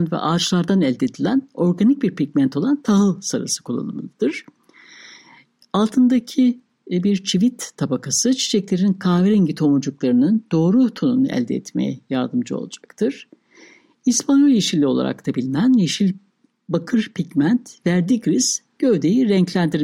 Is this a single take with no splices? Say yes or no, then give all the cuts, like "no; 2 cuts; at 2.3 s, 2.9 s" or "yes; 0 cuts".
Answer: yes; 0 cuts